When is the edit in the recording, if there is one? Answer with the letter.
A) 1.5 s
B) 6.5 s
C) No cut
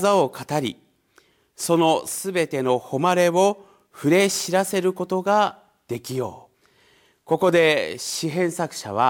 B